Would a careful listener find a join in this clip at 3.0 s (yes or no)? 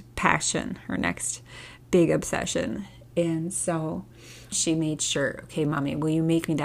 no